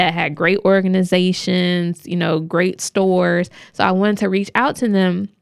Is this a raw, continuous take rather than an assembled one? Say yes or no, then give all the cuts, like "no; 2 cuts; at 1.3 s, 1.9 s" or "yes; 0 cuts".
yes; 0 cuts